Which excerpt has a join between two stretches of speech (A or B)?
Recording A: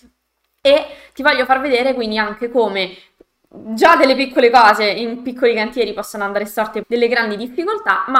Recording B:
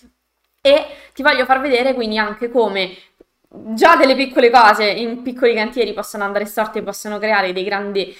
A